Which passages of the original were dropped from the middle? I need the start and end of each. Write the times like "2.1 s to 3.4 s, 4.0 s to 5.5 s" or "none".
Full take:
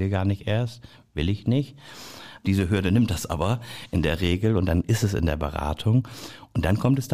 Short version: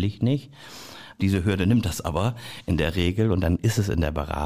none